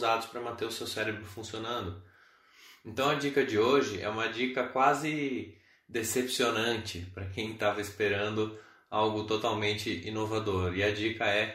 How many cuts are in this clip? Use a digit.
0